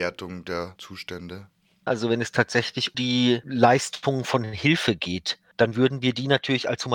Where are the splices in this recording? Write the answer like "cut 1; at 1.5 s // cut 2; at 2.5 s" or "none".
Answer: cut 1; at 1.9 s // cut 2; at 2.9 s